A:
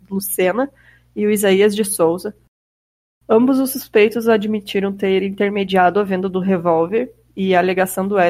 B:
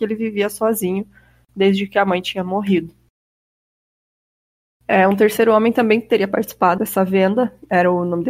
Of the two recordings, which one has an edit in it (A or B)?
B